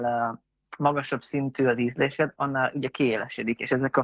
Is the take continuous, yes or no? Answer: no